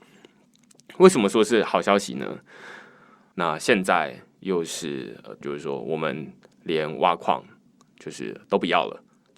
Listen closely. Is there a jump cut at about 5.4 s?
yes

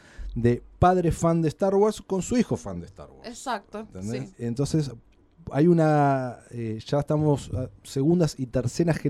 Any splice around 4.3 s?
yes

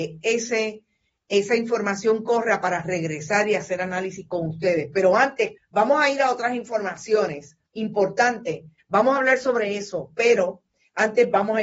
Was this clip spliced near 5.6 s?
yes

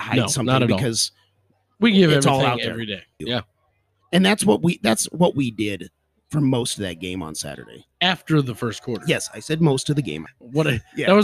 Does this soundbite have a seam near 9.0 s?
no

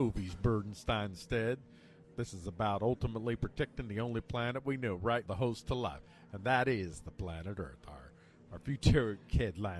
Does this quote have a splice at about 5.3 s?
yes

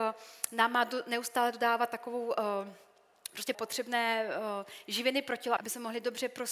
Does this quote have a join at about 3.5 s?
yes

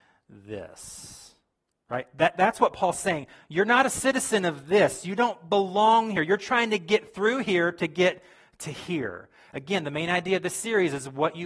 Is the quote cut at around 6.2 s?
no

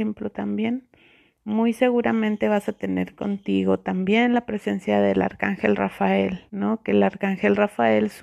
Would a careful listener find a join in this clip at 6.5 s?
yes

